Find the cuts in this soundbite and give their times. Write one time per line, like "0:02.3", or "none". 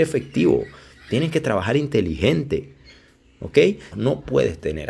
0:03.9